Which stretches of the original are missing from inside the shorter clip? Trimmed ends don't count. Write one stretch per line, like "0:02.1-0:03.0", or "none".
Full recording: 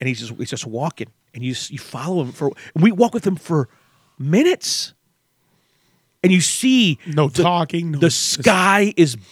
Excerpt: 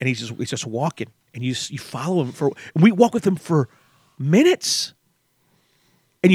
none